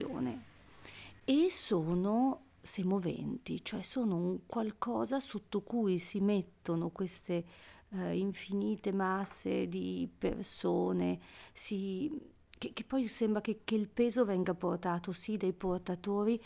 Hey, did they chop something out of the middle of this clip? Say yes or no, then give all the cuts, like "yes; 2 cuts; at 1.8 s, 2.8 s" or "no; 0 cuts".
no; 0 cuts